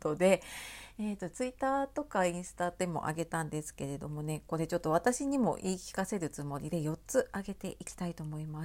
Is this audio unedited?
yes; 0 cuts

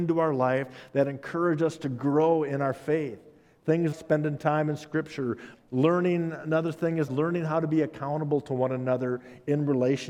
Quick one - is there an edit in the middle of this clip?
yes; 3 cuts; at 3.9 s, 5.5 s, 7.1 s

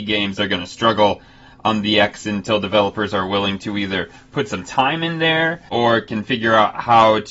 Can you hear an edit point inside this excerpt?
yes; 1 cut; at 5.7 s

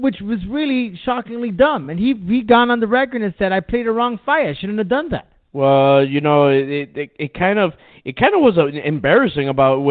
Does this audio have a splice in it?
no; 0 cuts

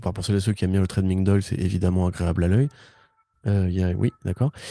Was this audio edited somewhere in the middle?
no; 0 cuts

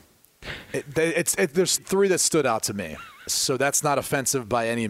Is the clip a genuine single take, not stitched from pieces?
no; 2 cuts; at 1.8 s, 3.3 s

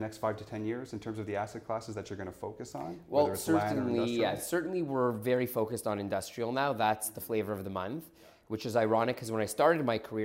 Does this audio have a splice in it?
no; 0 cuts

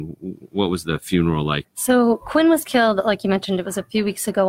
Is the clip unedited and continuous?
no; 1 cut; at 1.6 s

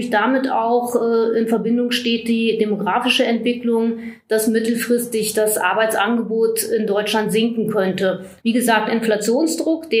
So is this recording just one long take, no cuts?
no; 1 cut; at 8.4 s

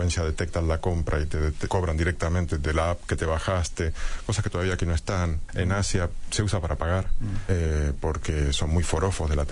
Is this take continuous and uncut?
no; 3 cuts; at 1.7 s, 5.5 s, 7.5 s

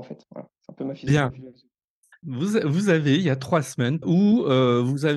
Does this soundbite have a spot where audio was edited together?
yes; 2 cuts; at 2.2 s, 4.0 s

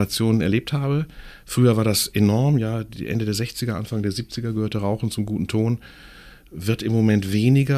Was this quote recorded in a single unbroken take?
yes; 0 cuts

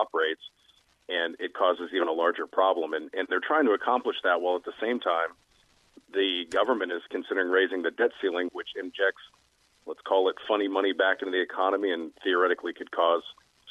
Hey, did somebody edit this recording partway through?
yes; 1 cut; at 8.5 s

